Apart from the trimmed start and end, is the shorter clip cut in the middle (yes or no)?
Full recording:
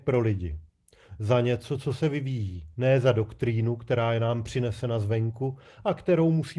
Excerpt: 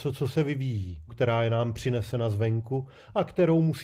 yes